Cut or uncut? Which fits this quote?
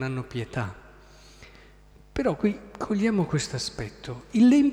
uncut